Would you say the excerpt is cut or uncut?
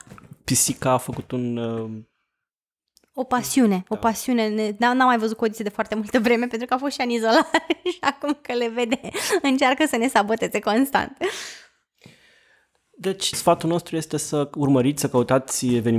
cut